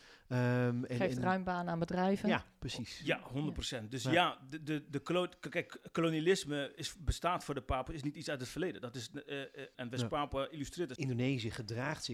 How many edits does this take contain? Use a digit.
2